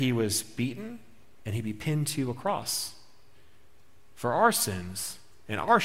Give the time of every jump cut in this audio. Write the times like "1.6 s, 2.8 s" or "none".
1.4 s